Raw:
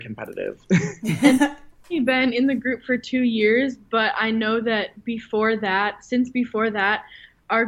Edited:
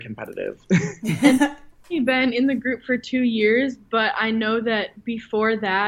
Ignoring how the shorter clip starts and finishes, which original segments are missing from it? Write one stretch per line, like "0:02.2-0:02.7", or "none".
none